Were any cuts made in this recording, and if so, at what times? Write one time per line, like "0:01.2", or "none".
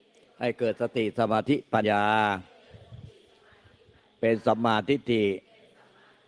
0:01.8